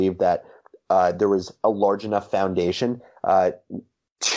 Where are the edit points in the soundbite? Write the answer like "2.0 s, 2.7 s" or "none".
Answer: none